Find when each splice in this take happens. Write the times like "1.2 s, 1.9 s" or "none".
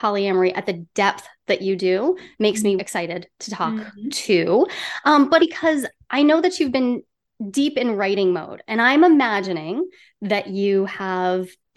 2.8 s, 5.4 s